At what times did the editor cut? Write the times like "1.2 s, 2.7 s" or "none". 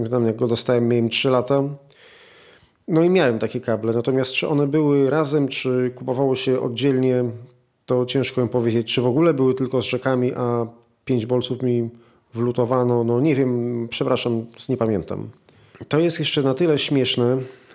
none